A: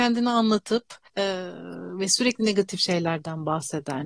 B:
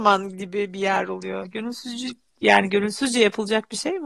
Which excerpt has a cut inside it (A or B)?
A